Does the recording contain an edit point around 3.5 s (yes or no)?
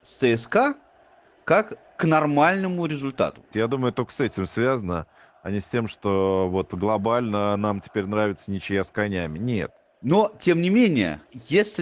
yes